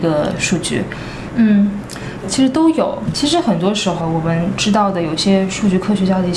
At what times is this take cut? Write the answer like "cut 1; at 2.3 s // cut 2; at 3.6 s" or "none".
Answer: cut 1; at 1.3 s // cut 2; at 3.1 s